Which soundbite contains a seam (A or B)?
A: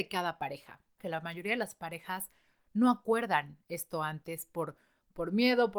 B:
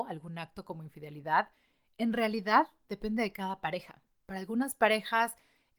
A